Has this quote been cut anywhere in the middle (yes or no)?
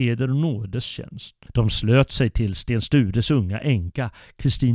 yes